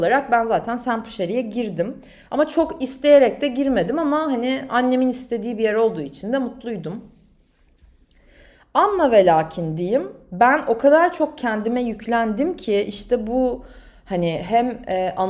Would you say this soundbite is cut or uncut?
uncut